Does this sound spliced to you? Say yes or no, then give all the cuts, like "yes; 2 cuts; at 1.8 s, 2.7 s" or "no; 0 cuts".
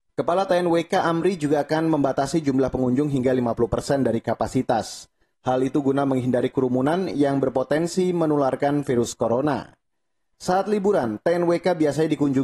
no; 0 cuts